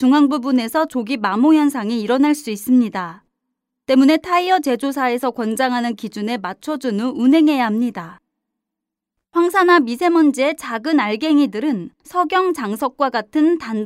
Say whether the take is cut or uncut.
cut